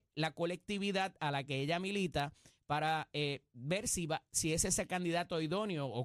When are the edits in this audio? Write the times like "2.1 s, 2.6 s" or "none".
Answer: none